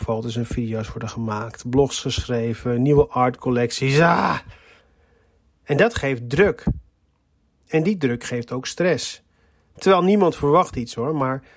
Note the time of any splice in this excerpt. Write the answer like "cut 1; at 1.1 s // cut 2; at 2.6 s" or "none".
none